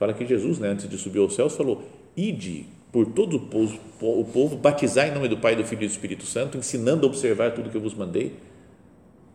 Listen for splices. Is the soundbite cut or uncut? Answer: uncut